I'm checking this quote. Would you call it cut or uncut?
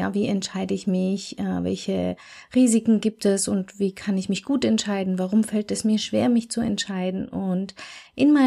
uncut